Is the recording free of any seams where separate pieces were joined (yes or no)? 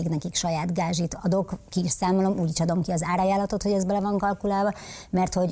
yes